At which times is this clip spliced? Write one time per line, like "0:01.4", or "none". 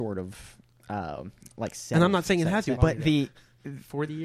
0:02.7